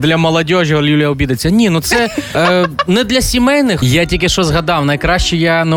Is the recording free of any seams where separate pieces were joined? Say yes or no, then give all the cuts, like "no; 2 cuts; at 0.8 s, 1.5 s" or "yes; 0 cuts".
no; 2 cuts; at 2.3 s, 3.8 s